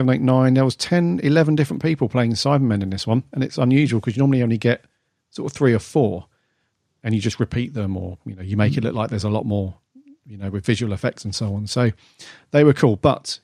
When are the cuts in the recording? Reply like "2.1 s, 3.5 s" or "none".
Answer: none